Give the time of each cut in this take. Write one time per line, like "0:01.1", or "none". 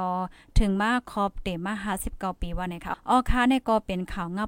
0:02.9

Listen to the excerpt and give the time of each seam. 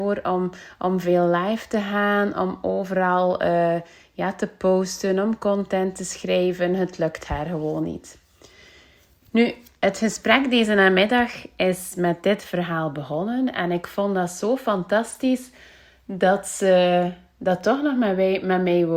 none

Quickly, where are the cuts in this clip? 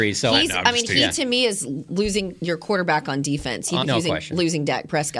0:03.8

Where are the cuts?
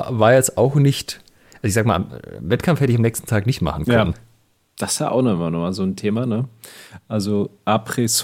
none

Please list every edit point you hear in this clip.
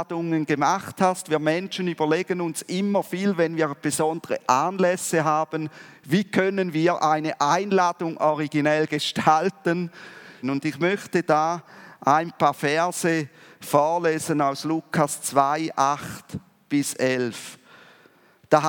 0:10.4

